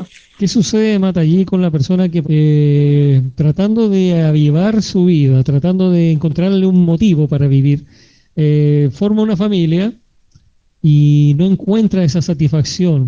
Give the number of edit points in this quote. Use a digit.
1